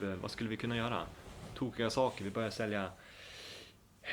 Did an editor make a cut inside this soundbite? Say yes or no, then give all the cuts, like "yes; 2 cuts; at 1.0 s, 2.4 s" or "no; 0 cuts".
no; 0 cuts